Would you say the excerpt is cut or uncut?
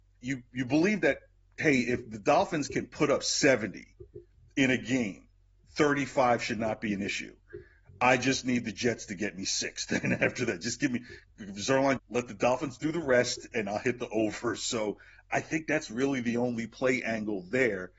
cut